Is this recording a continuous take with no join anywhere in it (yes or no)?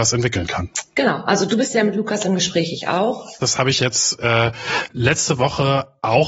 no